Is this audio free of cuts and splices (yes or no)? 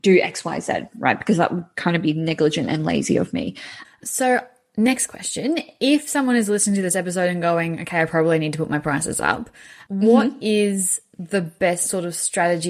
no